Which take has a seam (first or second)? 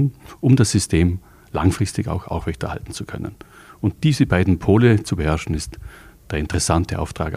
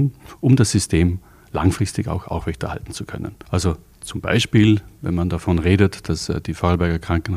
second